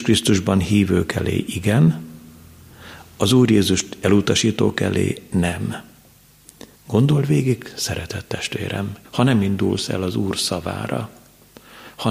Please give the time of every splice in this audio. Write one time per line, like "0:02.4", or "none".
0:06.7
0:09.0